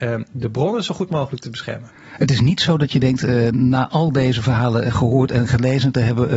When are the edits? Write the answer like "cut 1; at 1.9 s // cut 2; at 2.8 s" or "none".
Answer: none